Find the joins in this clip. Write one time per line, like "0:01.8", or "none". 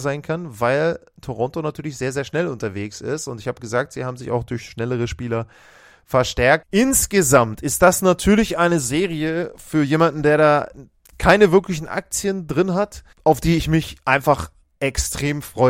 0:06.6
0:13.1